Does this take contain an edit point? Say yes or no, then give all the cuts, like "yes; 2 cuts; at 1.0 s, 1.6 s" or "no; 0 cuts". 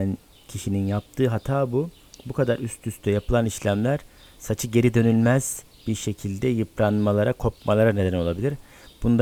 no; 0 cuts